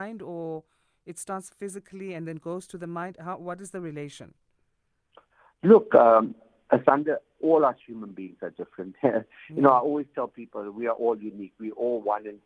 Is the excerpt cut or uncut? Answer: uncut